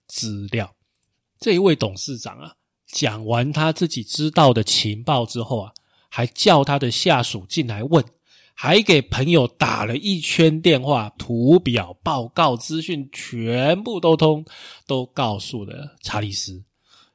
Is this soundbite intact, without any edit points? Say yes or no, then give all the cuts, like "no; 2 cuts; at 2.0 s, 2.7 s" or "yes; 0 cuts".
no; 1 cut; at 11.2 s